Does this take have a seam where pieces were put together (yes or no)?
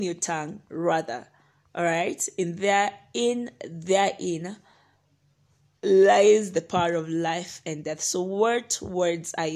no